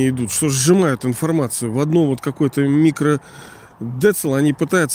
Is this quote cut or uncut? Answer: uncut